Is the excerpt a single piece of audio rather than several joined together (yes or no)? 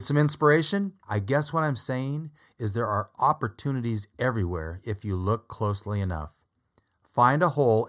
no